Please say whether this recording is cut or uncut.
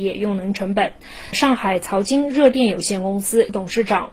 uncut